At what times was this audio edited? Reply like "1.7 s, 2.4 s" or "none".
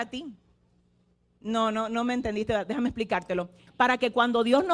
3.7 s